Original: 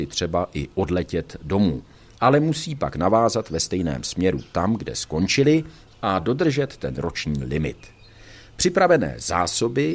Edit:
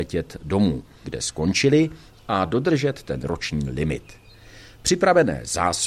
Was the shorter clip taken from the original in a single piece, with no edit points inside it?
no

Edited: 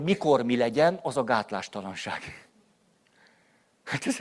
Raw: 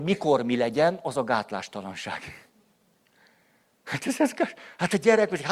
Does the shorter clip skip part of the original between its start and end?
no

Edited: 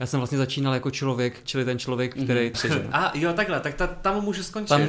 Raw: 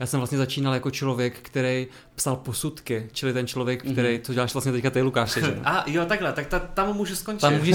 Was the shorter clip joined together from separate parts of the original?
yes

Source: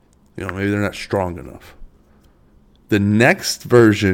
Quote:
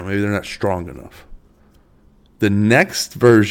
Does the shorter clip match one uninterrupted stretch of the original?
yes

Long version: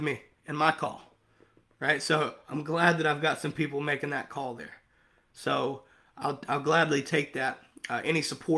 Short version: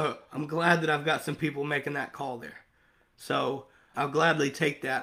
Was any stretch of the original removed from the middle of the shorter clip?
yes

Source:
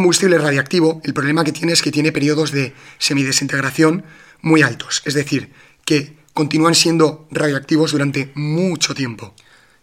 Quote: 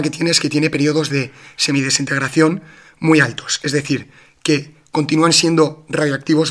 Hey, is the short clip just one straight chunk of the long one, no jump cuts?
yes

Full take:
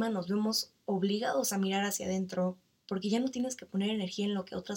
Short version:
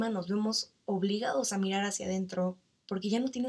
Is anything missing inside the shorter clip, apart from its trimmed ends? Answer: no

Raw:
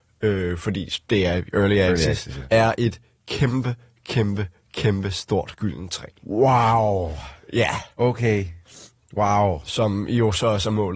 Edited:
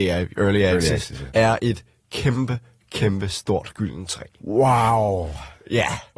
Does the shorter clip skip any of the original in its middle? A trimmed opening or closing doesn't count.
yes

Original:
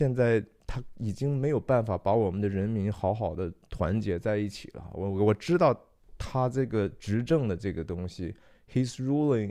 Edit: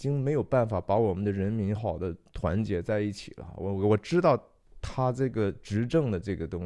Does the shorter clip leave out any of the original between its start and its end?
yes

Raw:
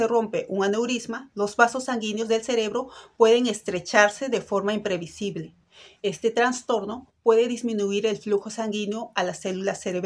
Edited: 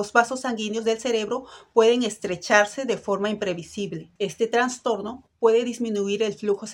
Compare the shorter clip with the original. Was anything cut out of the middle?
yes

